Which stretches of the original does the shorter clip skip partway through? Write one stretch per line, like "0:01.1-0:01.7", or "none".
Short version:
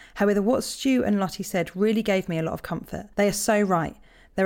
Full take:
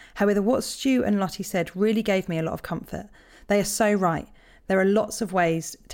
0:03.1-0:03.4

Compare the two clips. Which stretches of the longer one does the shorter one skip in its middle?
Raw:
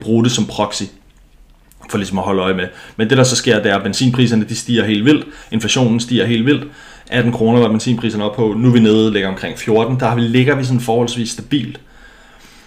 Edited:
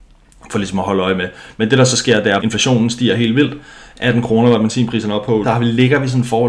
0:03.8-0:05.5
0:08.5-0:10.0

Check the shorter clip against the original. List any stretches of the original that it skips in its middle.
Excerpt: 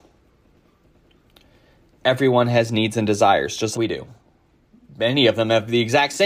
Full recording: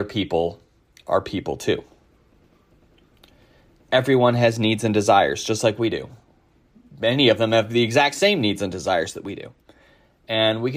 0:05.6-0:05.8

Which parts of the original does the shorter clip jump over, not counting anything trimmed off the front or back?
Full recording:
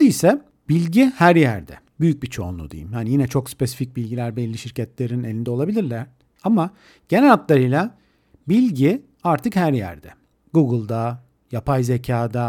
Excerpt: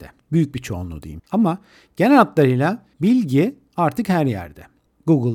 0:02.9-0:06.3
0:08.1-0:08.4

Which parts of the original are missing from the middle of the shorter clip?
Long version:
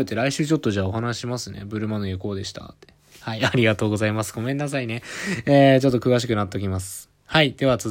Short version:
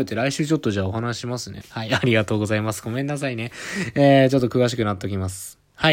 0:01.6-0:03.1

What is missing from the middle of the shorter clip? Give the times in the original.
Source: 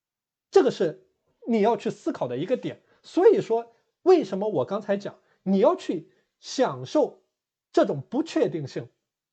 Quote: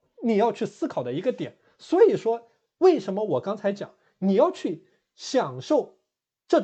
none

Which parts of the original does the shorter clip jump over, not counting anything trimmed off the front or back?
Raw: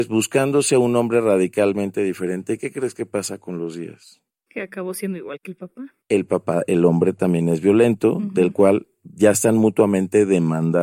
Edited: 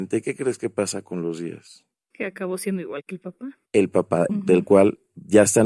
0:06.7-0:08.2

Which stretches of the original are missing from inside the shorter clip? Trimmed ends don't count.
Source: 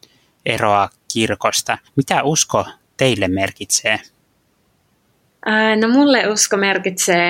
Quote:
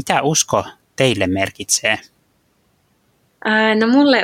none

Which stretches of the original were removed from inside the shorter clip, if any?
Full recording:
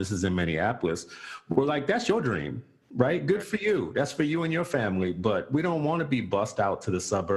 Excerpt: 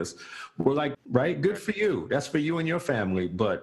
0:01.9-0:02.8

